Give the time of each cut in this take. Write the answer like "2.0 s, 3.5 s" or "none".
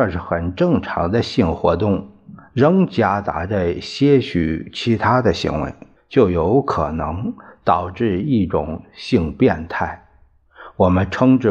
6.0 s